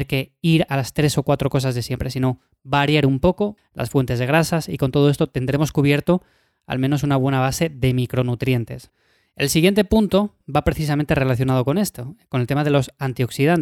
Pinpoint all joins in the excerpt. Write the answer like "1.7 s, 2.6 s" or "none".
3.6 s